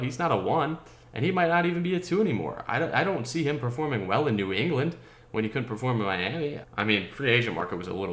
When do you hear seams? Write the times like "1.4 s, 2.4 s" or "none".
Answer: 6.6 s